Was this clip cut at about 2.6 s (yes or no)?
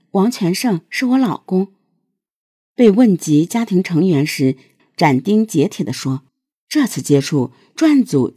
no